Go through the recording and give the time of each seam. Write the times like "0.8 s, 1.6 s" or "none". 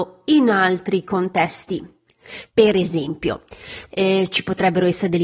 2.5 s, 3.9 s